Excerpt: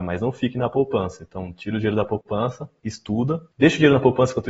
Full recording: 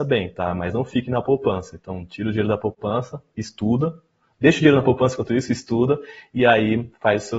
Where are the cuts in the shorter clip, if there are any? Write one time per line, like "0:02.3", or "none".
0:03.5